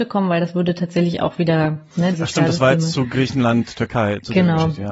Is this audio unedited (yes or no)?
no